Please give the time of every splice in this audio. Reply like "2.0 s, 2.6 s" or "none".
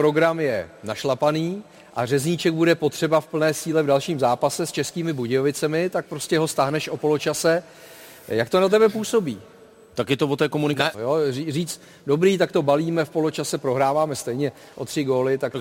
10.9 s